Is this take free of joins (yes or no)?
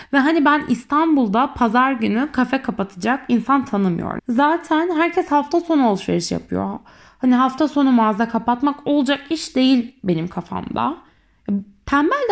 no